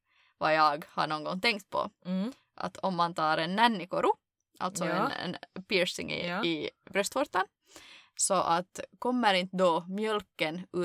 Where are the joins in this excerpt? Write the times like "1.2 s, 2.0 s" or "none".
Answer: none